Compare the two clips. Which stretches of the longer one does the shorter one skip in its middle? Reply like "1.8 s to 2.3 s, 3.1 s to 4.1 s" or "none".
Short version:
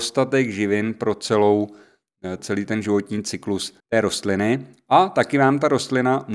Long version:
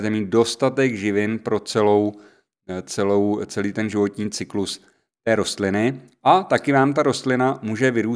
2.8 s to 3.5 s, 4.9 s to 5.1 s